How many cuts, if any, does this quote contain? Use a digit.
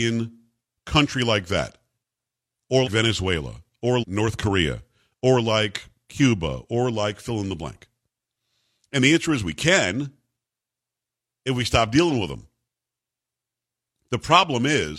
2